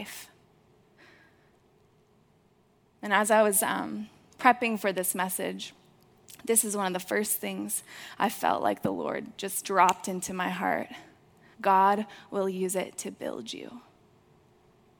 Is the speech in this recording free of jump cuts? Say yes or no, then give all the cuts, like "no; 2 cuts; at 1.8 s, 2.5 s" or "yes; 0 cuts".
no; 1 cut; at 11.5 s